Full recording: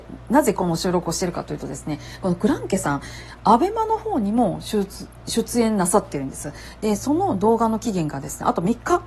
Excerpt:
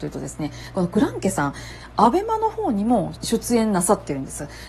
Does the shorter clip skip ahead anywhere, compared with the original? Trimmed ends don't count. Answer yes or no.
yes